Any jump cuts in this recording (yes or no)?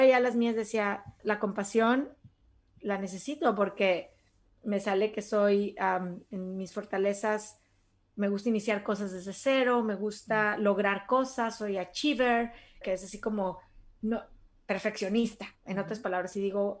yes